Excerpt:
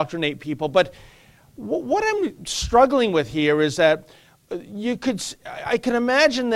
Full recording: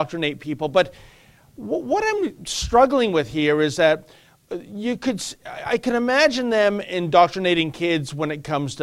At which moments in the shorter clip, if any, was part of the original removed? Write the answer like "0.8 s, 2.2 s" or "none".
none

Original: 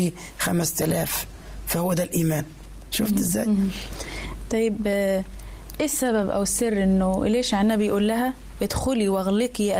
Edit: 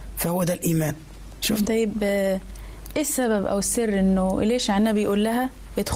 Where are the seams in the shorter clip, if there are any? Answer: 1.6 s

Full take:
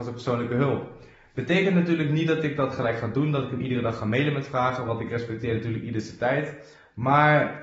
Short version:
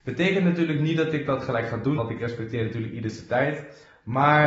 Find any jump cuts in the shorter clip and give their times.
2.0 s

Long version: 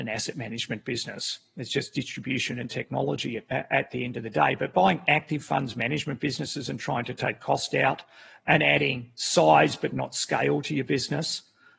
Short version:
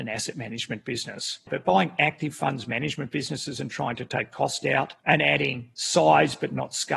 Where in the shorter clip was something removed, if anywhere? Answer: 1.5 s, 5.0 s

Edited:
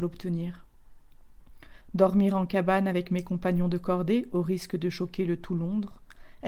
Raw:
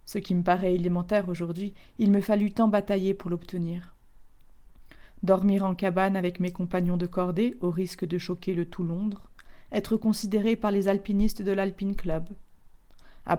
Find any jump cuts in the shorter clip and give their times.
none

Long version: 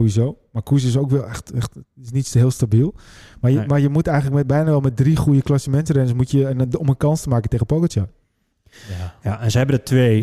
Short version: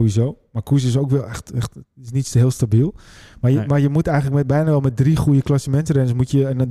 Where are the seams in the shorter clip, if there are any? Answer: none

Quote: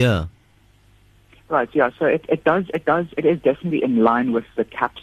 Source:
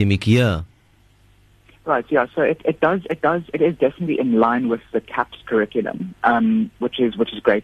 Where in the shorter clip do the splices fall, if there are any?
none

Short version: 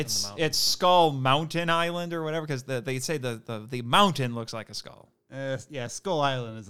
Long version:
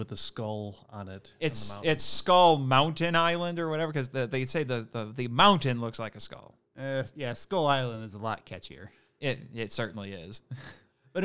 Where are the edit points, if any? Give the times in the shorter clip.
none

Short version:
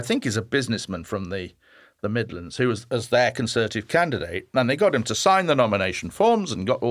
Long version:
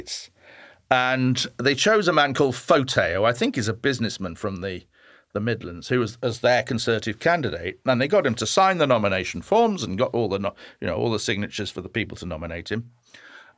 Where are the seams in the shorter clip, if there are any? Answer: none

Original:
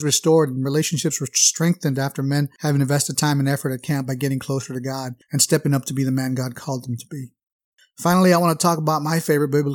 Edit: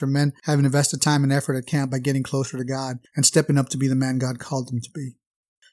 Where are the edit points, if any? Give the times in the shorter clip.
none

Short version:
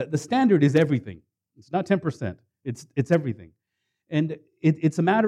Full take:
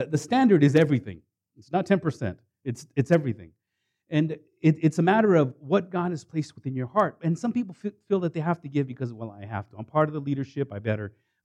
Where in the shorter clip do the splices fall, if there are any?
none

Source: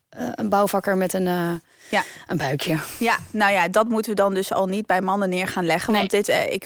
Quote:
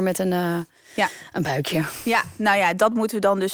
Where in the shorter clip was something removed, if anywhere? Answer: none

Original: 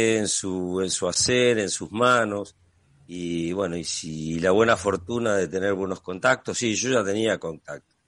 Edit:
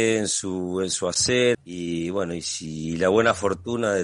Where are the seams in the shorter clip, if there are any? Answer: 1.5 s

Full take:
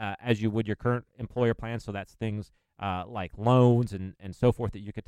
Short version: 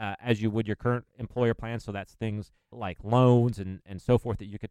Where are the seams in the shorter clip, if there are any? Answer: 2.7 s

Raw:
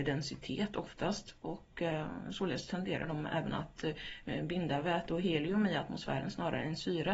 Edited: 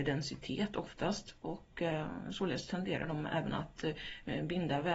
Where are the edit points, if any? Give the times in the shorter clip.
none

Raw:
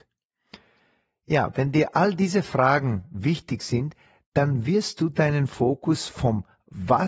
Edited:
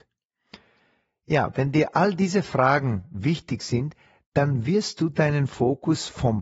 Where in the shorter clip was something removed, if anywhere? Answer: none

